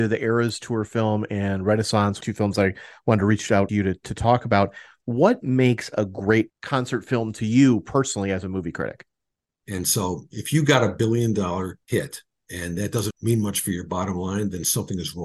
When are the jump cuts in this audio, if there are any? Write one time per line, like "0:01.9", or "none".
0:09.6
0:13.1